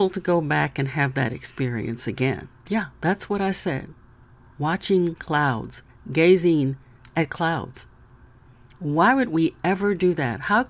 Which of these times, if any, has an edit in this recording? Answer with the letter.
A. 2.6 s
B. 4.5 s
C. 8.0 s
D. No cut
A